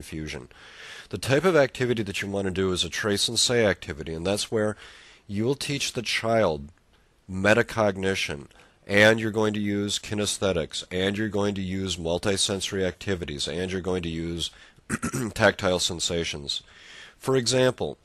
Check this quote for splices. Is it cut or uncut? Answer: uncut